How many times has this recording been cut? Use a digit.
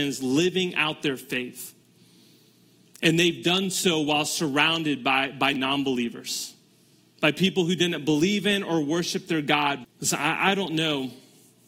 1